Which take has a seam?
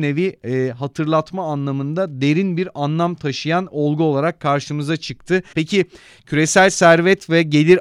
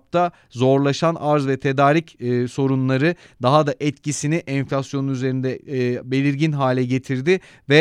first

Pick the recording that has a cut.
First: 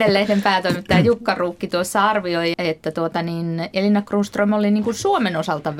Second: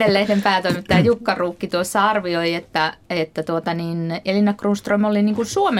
first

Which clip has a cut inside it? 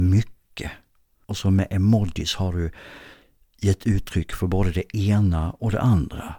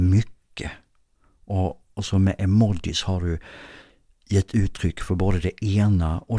first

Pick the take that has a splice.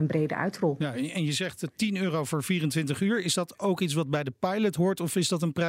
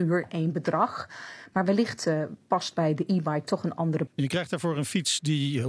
second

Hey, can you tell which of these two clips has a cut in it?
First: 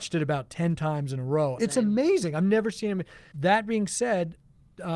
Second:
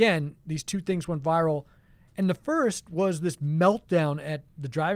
first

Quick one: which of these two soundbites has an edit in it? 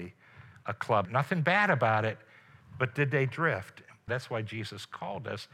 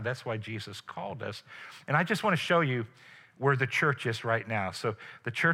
first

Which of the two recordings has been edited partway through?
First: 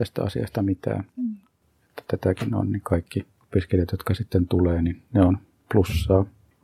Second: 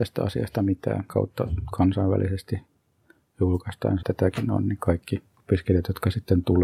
second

